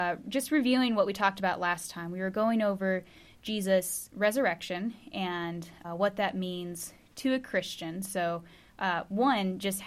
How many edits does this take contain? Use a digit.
1